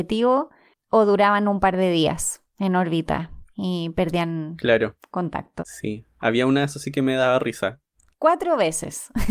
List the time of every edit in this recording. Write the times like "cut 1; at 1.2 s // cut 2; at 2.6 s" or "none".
cut 1; at 5.6 s // cut 2; at 8.1 s